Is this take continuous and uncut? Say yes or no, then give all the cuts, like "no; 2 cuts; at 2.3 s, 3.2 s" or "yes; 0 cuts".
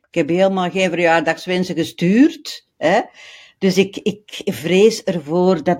yes; 0 cuts